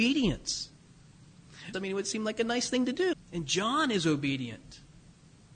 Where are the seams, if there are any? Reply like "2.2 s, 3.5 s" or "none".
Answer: 1.7 s, 3.1 s